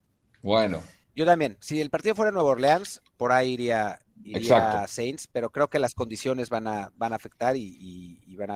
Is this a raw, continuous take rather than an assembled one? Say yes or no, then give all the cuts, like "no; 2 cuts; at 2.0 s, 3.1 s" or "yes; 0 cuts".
no; 1 cut; at 1.0 s